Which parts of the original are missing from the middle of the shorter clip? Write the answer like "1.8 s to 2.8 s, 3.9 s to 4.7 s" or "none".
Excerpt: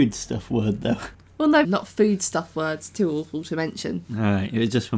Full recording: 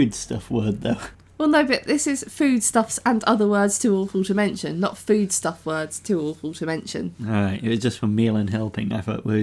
1.6 s to 4.7 s